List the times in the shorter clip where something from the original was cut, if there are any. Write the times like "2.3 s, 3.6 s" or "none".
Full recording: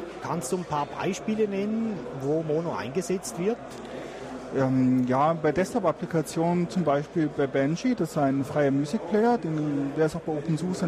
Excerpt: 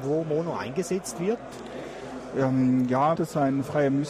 3.2 s